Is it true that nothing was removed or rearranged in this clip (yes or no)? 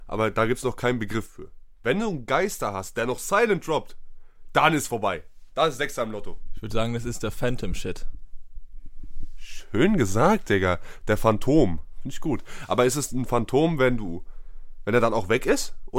yes